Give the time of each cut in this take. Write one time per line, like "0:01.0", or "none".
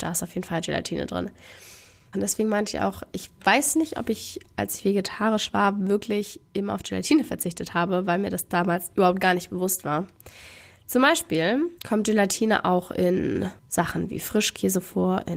0:02.1
0:11.8
0:13.6